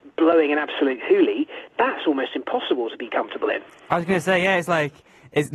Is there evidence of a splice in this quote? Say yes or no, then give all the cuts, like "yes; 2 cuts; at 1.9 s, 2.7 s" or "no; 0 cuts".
no; 0 cuts